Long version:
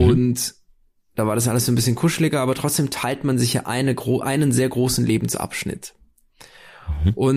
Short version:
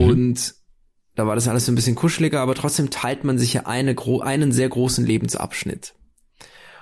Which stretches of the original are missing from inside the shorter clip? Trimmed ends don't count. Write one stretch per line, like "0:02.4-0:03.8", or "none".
none